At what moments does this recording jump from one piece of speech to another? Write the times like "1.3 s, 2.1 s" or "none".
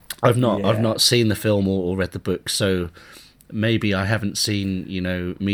none